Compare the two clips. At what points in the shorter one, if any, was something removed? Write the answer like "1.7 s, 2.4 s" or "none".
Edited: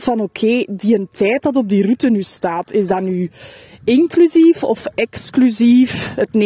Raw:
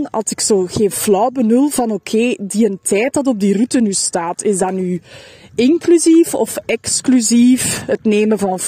none